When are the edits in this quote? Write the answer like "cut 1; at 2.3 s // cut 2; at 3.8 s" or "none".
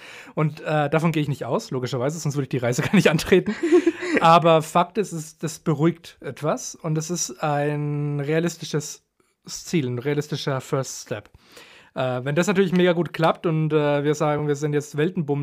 none